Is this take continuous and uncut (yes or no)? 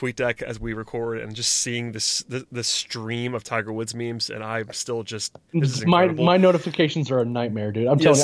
yes